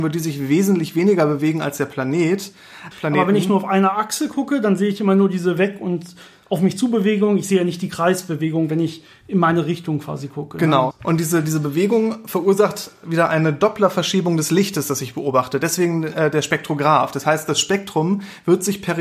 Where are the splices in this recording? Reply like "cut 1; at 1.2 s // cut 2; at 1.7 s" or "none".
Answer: cut 1; at 2.9 s // cut 2; at 10.9 s